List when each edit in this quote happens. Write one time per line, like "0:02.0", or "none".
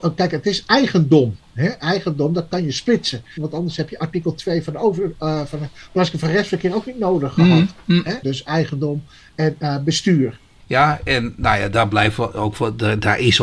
0:03.4
0:08.2
0:10.6